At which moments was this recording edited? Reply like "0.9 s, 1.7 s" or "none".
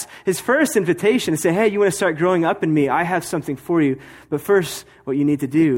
none